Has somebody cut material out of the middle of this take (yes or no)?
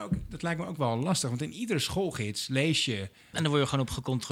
yes